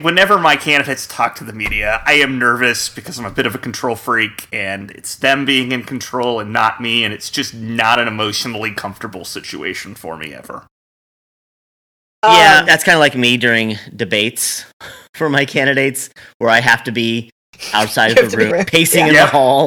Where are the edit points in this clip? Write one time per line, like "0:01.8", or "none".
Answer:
0:02.1
0:12.6
0:18.5

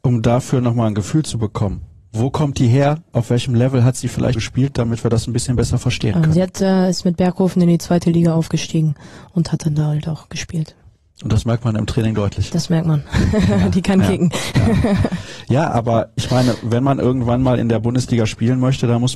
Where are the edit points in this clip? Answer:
0:04.4

